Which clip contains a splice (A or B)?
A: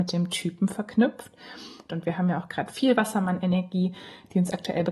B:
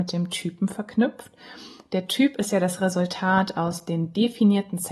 A